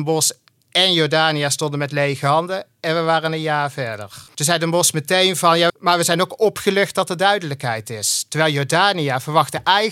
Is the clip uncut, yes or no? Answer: no